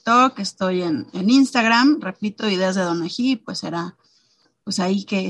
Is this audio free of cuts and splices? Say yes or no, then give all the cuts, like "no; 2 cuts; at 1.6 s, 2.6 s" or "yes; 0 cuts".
yes; 0 cuts